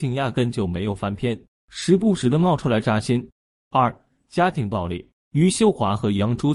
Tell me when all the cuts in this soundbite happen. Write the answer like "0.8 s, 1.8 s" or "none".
none